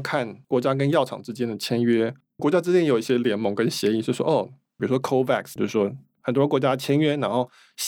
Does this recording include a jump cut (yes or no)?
yes